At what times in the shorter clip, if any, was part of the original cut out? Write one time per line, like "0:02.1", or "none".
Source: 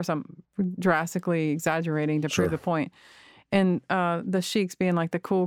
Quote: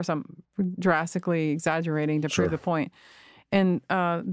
none

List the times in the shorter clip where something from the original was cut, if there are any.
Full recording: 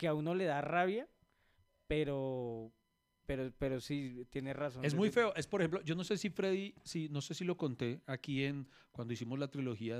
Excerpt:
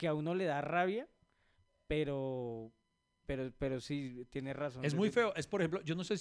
none

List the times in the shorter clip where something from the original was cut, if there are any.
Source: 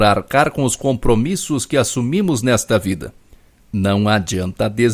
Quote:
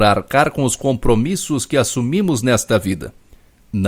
none

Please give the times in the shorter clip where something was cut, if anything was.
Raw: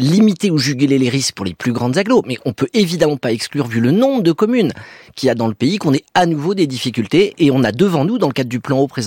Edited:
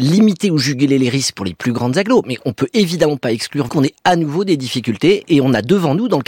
0:03.7

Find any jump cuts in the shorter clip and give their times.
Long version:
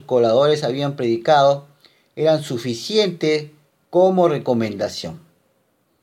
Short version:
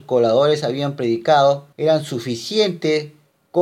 0:01.7

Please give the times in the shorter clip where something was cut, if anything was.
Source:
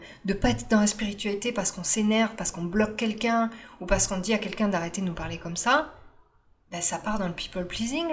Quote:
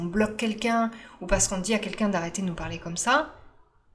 none

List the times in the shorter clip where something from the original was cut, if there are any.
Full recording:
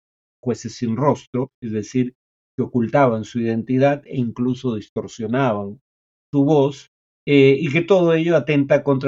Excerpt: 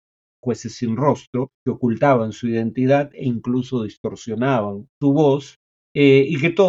0:01.6
0:04.9

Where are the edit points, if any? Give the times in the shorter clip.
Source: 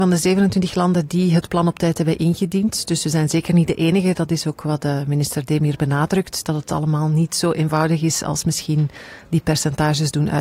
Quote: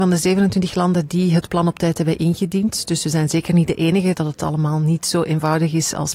0:04.1

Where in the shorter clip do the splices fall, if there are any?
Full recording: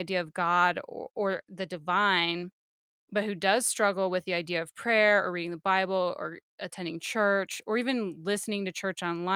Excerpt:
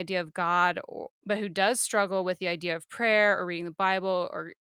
0:01.1

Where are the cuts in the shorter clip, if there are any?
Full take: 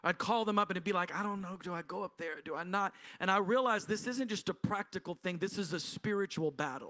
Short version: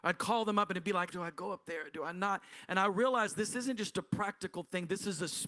0:01.1

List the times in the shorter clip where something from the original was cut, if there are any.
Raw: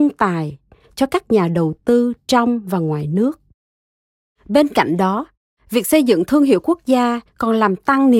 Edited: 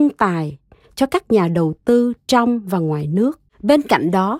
0:03.5

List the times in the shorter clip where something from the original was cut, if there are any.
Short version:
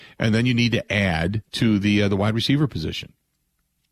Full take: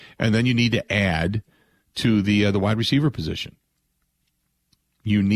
0:01.5

